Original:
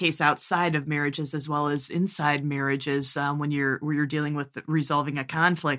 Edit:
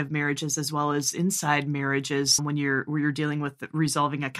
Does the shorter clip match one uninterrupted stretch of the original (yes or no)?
no